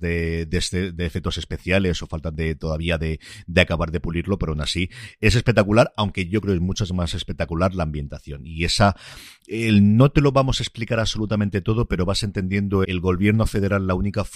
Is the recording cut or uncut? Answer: cut